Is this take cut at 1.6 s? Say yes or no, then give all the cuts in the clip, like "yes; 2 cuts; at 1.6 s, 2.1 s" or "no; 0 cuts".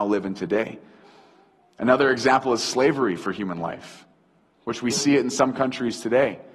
no; 1 cut; at 4.9 s